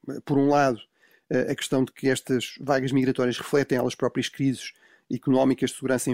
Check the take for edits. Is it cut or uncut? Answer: uncut